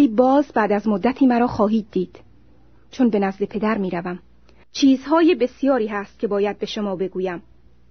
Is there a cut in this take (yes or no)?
yes